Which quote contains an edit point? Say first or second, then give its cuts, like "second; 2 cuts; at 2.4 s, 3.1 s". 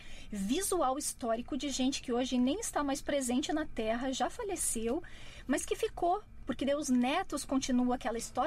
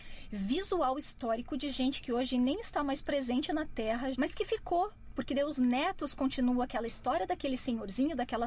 second; 1 cut; at 4.1 s